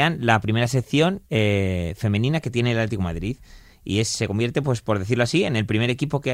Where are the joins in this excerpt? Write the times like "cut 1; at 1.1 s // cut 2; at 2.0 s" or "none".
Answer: cut 1; at 1.3 s